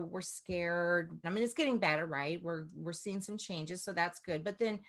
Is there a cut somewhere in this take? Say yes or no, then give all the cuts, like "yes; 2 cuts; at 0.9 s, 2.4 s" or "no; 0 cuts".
yes; 1 cut; at 1.2 s